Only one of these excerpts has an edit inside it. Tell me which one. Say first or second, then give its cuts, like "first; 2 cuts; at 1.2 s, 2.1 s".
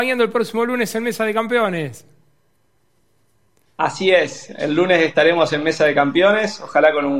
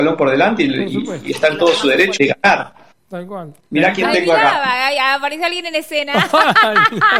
second; 2 cuts; at 2.2 s, 3.6 s